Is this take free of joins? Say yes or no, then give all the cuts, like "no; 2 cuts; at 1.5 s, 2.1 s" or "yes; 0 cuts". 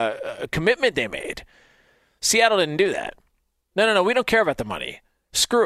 no; 1 cut; at 3.7 s